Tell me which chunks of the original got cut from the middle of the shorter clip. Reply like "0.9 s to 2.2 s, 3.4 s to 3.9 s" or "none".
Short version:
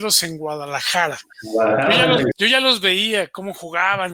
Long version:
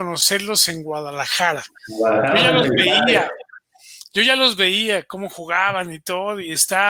2.8 s to 4.1 s